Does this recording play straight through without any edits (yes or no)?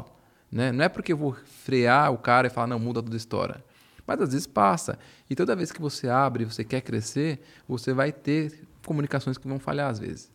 yes